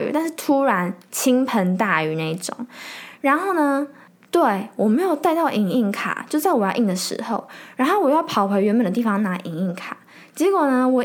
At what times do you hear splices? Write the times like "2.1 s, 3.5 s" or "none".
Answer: 3.2 s